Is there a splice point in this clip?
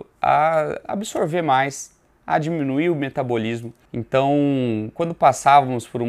yes; 1 cut; at 3.9 s

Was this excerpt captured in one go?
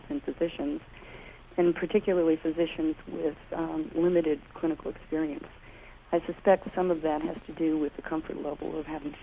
yes; 0 cuts

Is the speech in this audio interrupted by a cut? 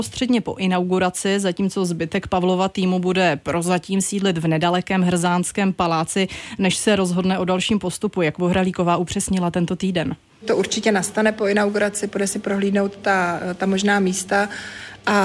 no; 0 cuts

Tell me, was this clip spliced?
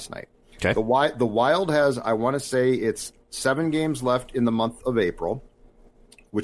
no; 0 cuts

